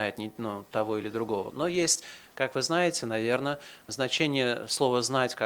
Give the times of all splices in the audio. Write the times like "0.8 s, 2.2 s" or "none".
1.5 s